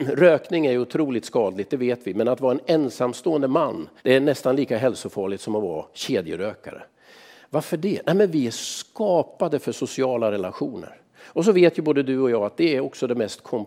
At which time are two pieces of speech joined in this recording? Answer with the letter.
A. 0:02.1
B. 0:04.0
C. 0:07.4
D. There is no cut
B